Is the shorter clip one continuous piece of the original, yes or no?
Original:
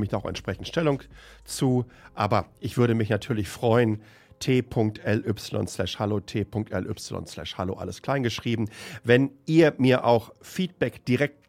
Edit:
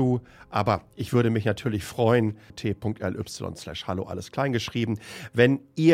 no